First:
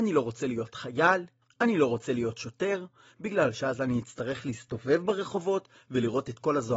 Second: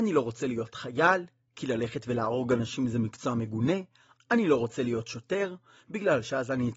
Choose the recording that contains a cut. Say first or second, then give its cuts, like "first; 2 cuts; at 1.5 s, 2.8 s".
first; 1 cut; at 1.4 s